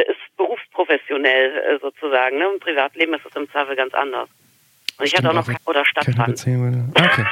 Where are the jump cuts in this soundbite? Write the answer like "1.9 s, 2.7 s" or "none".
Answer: 5.5 s